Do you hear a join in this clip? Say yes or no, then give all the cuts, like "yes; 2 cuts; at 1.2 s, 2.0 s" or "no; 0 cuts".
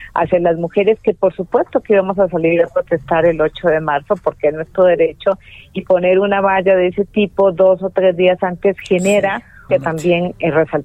yes; 1 cut; at 9.7 s